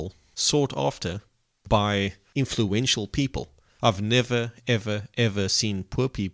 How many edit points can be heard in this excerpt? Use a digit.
1